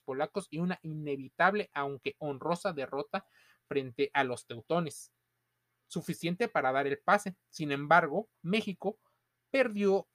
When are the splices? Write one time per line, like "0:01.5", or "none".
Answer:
none